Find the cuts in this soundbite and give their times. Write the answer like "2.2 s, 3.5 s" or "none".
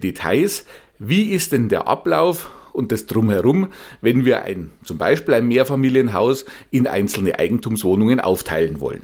none